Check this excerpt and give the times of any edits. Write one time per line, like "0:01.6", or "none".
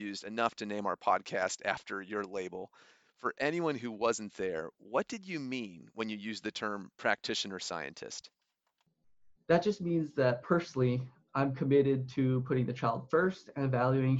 none